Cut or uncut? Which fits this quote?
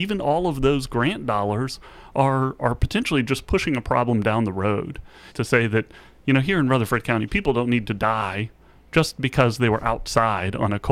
cut